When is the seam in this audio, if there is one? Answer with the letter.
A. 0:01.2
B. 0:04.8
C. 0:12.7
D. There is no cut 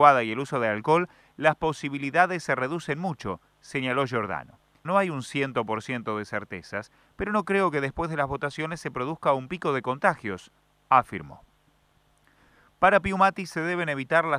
B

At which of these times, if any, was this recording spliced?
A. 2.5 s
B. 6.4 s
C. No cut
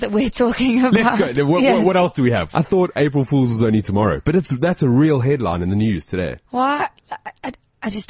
A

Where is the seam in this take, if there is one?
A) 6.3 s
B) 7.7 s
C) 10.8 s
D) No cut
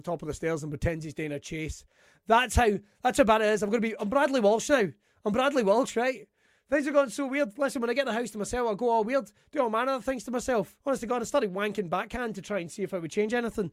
C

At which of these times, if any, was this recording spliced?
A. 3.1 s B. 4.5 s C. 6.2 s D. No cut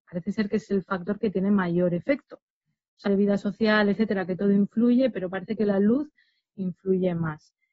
A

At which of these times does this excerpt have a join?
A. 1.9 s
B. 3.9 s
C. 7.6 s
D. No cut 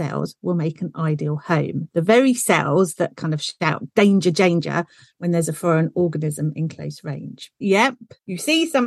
C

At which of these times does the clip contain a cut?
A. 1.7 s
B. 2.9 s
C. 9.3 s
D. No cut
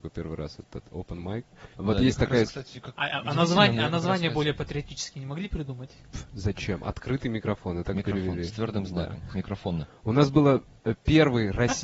A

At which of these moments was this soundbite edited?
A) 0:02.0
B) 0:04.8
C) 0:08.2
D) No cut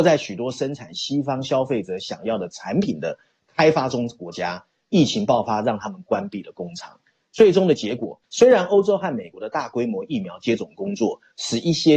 C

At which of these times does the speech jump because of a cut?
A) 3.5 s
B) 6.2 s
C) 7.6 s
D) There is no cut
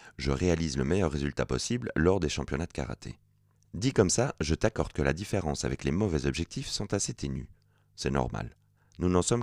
D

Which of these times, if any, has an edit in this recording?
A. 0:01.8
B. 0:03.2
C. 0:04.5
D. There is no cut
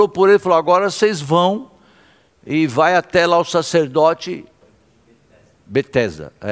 D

